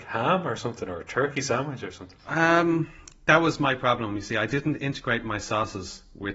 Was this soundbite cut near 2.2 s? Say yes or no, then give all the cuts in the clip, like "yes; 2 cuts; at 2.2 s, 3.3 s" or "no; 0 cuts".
yes; 1 cut; at 2.2 s